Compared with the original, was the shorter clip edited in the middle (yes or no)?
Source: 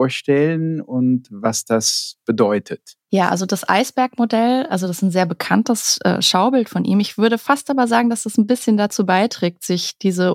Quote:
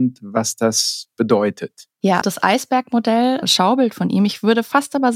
yes